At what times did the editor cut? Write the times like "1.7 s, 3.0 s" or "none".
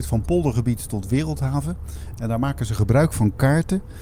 2.1 s